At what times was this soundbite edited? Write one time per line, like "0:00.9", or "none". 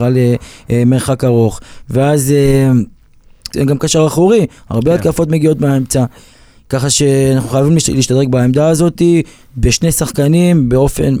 0:03.5